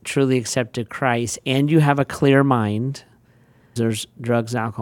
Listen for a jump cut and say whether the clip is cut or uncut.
cut